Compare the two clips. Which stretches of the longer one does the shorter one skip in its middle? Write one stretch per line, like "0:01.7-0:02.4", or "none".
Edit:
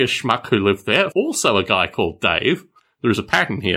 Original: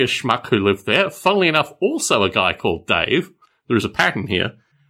0:01.1-0:01.8